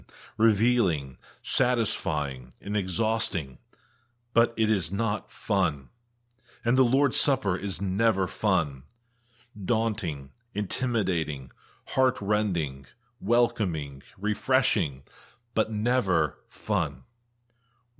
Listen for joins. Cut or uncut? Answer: cut